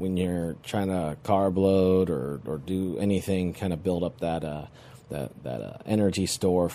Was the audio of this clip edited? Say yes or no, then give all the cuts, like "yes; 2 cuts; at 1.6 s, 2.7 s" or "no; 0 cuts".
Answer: no; 0 cuts